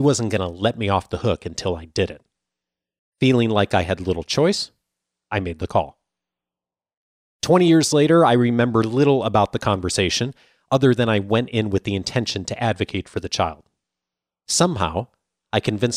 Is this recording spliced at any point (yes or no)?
yes